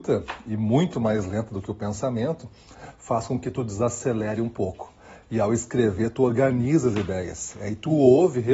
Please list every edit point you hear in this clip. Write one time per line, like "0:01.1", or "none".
none